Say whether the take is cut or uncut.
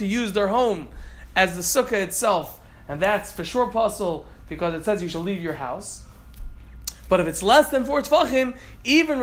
uncut